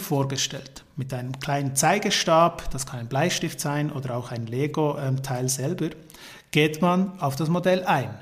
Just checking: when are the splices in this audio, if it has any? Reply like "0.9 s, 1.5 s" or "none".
none